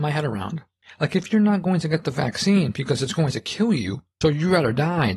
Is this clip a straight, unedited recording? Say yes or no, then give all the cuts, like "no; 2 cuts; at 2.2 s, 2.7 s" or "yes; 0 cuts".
no; 1 cut; at 4.2 s